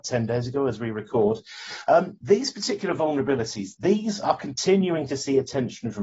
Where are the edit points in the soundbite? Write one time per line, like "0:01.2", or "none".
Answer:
0:03.7

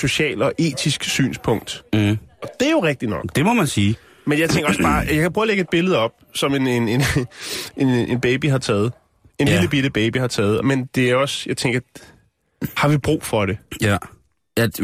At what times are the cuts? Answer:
0:10.6

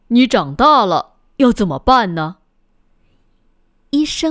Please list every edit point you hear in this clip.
none

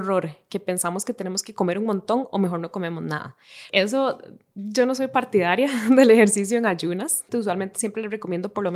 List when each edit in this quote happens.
0:03.7
0:07.3

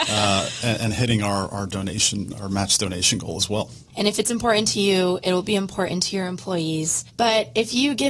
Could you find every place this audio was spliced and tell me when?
0:03.9
0:07.1

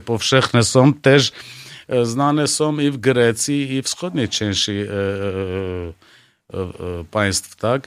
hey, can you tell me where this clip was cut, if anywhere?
none

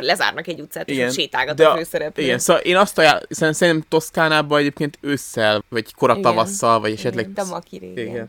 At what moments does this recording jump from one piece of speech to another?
0:05.6
0:07.3

